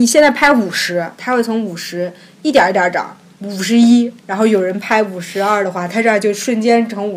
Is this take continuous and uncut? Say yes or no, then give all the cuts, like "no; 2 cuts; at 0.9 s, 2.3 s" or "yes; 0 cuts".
no; 1 cut; at 1.2 s